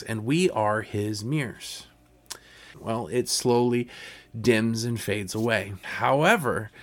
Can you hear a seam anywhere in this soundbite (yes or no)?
yes